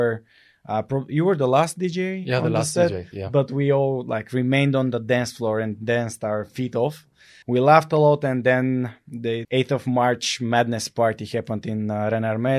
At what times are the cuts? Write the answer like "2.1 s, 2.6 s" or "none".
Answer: 7.4 s, 9.4 s